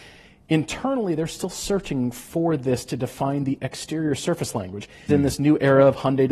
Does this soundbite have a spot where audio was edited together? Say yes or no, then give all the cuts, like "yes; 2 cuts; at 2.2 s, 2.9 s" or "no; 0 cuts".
yes; 1 cut; at 5.1 s